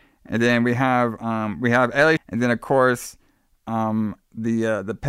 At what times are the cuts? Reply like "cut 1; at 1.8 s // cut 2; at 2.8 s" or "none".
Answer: cut 1; at 2.2 s